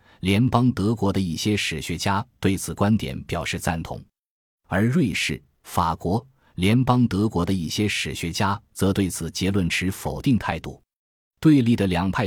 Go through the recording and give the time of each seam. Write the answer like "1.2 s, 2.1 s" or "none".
none